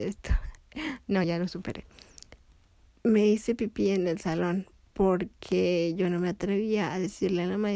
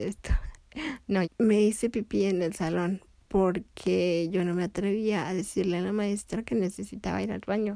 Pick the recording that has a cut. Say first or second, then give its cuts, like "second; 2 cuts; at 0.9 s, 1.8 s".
second; 1 cut; at 1.2 s